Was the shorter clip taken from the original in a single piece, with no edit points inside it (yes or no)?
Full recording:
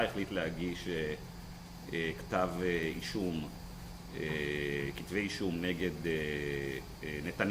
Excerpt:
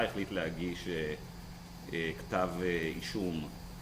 yes